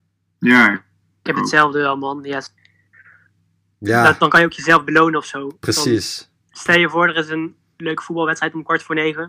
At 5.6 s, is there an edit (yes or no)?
no